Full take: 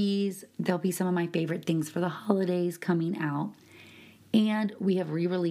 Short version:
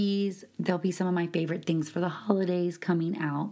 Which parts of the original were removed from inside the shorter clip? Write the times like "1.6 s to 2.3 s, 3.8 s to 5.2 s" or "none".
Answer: none